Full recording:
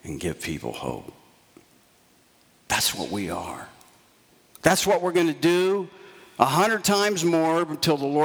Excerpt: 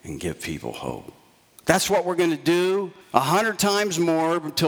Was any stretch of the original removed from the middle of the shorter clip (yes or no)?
yes